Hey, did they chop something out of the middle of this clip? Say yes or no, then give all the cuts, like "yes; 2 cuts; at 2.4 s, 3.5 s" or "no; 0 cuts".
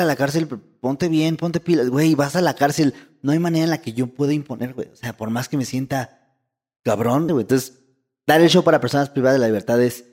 yes; 1 cut; at 7.3 s